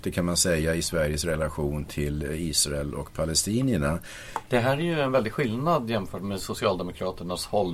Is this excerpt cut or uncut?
cut